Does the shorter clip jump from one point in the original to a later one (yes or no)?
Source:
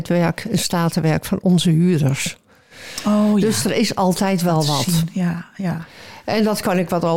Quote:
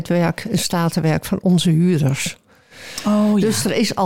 no